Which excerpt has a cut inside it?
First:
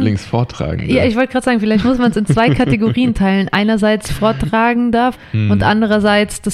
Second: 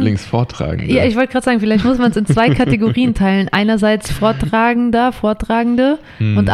first; 1 cut; at 5.1 s

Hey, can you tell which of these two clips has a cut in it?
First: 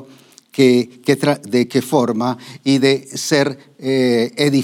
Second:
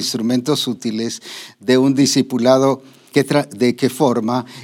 second; 1 cut; at 3.1 s

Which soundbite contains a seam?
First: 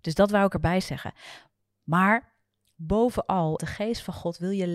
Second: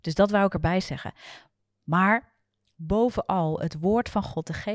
first; 1 cut; at 3.6 s

